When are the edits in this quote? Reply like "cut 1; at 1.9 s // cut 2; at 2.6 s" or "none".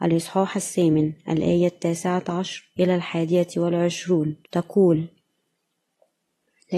cut 1; at 4.5 s